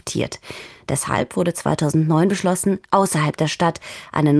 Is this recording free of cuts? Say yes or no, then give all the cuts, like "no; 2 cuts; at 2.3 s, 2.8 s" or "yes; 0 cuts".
yes; 0 cuts